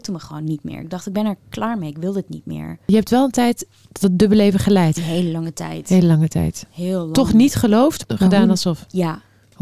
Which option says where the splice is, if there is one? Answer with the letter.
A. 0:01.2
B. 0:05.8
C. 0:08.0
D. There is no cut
C